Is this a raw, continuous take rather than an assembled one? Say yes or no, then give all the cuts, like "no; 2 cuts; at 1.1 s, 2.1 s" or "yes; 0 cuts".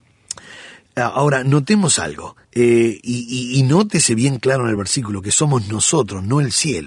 no; 1 cut; at 2.4 s